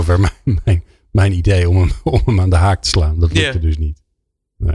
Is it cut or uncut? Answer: uncut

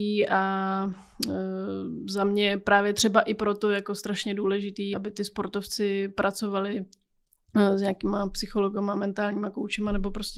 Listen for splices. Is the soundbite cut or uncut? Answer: cut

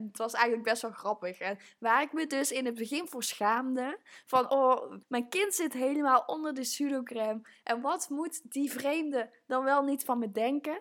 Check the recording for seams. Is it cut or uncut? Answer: uncut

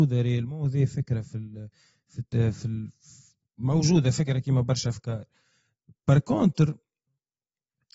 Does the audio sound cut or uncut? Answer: uncut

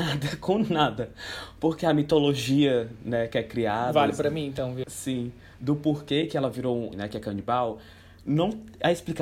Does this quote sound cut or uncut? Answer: cut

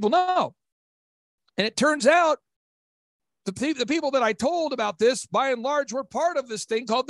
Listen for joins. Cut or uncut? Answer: uncut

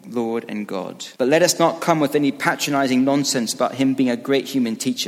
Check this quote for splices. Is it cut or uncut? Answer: cut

